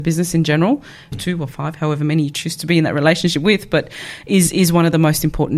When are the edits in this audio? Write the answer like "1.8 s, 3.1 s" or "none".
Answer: 1.1 s